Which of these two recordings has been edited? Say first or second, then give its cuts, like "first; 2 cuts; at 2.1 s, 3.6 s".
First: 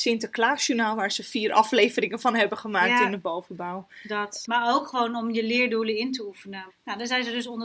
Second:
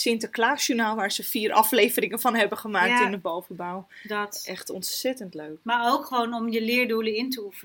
first; 2 cuts; at 4.4 s, 6.7 s